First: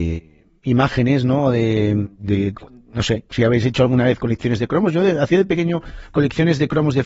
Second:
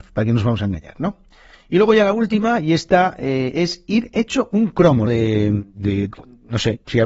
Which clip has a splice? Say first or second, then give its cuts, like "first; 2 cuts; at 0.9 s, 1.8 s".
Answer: second; 1 cut; at 5.1 s